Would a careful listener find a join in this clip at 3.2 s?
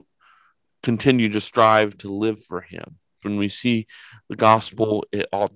yes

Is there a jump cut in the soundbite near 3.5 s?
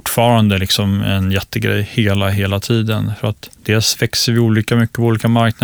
yes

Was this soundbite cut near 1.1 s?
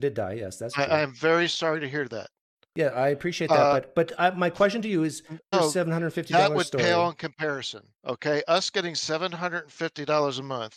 no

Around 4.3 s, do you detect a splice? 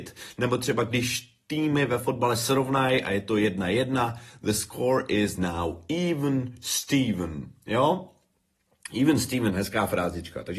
no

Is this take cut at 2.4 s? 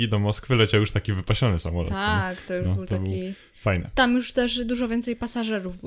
no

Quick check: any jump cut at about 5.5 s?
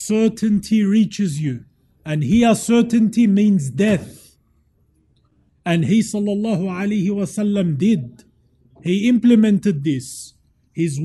yes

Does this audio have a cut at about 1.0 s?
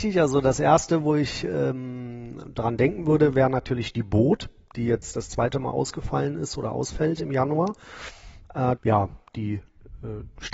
no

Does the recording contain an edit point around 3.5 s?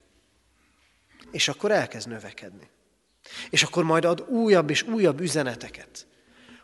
no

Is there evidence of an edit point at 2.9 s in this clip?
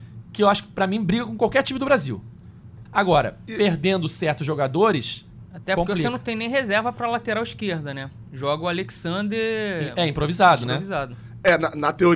yes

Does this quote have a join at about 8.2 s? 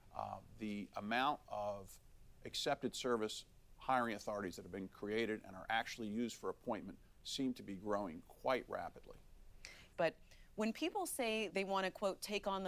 no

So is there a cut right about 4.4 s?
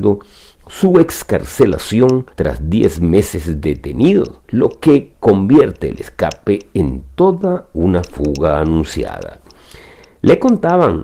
yes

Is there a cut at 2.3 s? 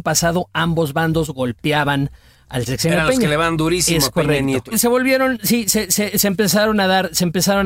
no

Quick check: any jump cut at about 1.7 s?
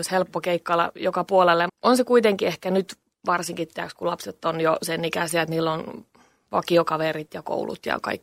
yes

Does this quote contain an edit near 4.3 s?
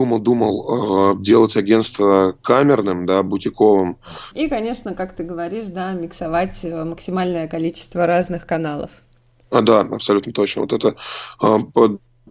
yes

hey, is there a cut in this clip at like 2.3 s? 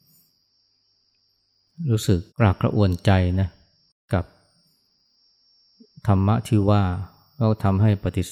yes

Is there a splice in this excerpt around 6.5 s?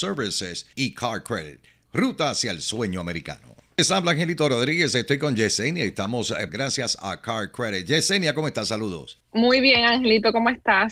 yes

